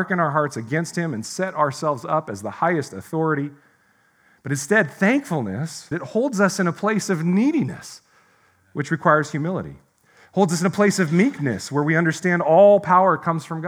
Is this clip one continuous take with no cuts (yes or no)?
no